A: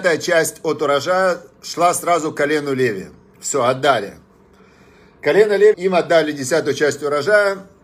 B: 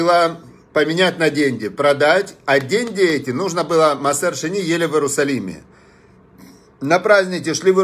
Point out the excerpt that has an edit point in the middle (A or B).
A